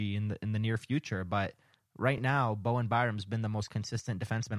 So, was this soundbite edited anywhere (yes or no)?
no